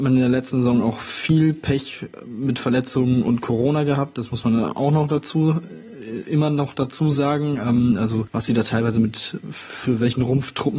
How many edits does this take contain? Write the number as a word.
zero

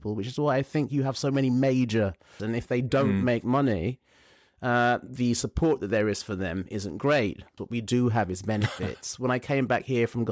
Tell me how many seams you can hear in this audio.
two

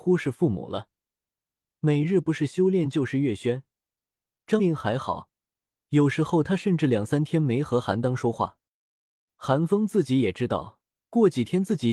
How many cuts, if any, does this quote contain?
one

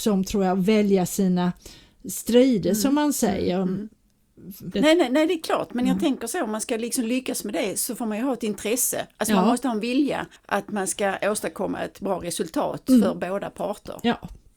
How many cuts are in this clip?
two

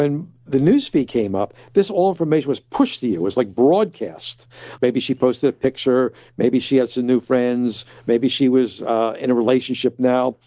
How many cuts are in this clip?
one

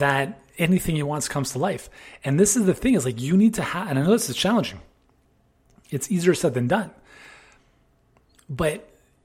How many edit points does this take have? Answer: zero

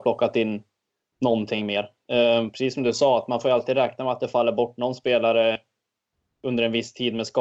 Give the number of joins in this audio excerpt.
zero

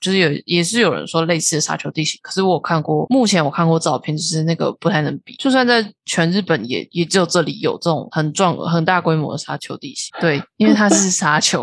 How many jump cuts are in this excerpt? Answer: two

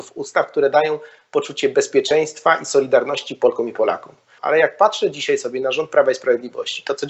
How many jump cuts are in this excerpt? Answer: one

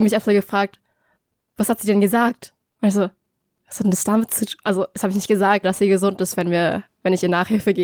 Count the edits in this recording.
one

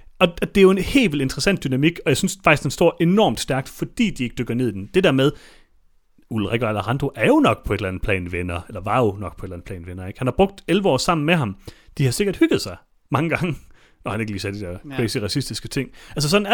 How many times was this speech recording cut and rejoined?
zero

